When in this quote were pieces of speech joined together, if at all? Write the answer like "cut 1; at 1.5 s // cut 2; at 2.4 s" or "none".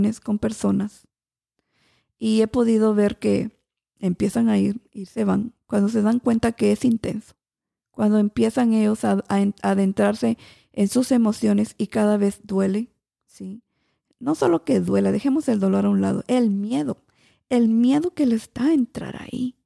none